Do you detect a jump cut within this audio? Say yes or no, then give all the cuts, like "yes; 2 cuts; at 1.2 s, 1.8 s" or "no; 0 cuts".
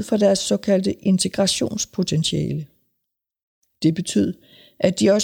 no; 0 cuts